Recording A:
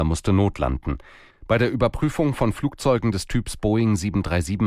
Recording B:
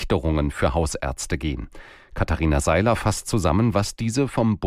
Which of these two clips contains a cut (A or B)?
A